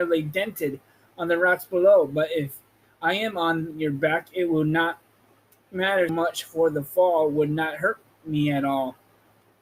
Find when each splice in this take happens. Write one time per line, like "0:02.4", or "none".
0:06.1